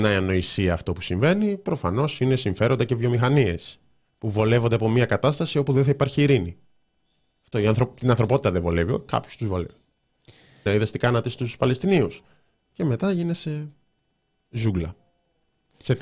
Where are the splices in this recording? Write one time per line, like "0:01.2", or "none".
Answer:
0:10.7